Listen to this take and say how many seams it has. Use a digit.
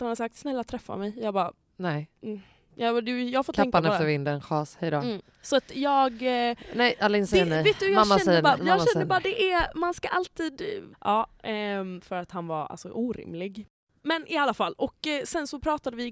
2